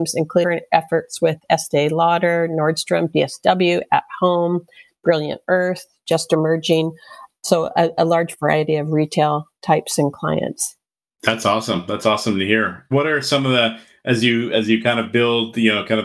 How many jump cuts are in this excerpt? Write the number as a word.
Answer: zero